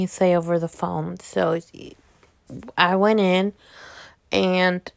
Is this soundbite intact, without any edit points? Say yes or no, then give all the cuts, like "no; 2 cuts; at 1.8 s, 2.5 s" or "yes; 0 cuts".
yes; 0 cuts